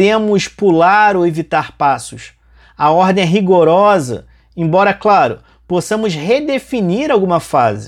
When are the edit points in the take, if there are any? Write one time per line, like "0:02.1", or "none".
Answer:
none